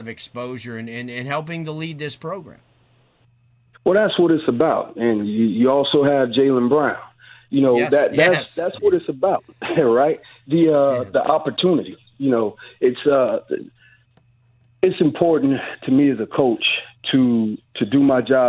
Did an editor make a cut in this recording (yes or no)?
no